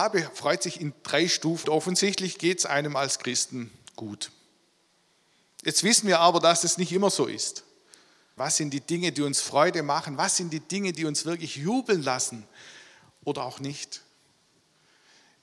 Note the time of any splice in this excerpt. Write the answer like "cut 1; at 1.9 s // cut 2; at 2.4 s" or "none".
cut 1; at 1.6 s // cut 2; at 8.4 s

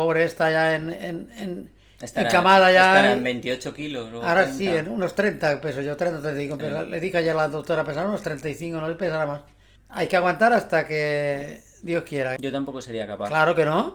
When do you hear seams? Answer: cut 1; at 9.8 s // cut 2; at 12.4 s

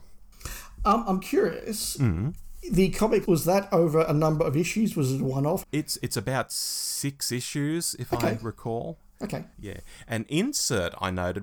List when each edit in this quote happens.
cut 1; at 3.3 s // cut 2; at 5.6 s // cut 3; at 9.5 s

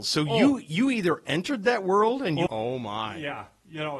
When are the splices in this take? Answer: cut 1; at 2.5 s

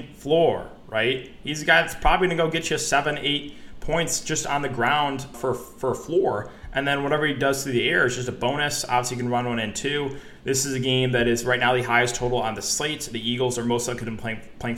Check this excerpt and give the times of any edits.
cut 1; at 5.3 s

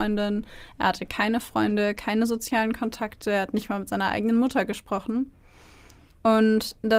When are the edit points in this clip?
none

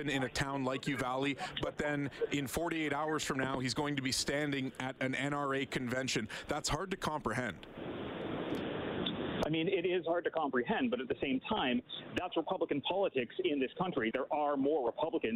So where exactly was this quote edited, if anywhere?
cut 1; at 14.1 s

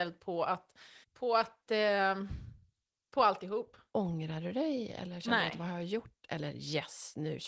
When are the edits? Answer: cut 1; at 1.0 s // cut 2; at 3.9 s

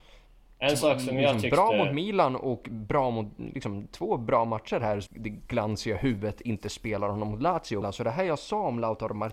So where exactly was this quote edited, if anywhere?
cut 1; at 5.1 s // cut 2; at 7.8 s

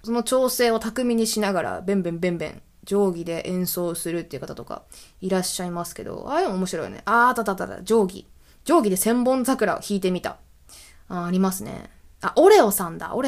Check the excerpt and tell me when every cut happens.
none

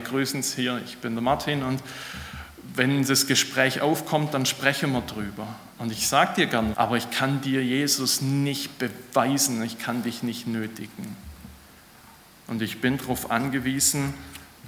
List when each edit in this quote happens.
cut 1; at 5.7 s // cut 2; at 6.7 s

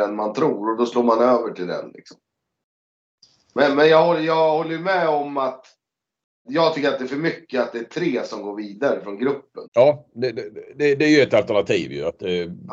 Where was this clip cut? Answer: cut 1; at 6.4 s // cut 2; at 9.6 s

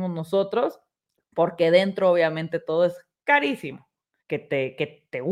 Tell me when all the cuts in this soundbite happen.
cut 1; at 4.2 s

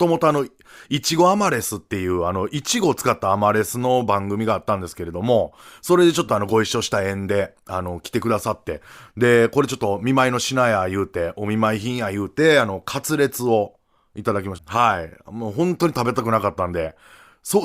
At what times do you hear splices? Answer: cut 1; at 14.6 s

